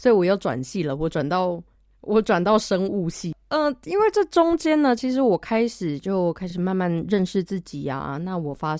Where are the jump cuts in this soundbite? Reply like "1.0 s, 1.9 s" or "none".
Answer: none